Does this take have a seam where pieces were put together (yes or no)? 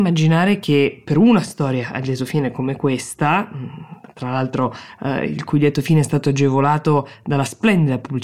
no